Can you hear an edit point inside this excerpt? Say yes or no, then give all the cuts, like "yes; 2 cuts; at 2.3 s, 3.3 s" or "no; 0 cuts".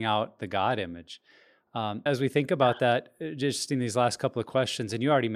yes; 1 cut; at 2.1 s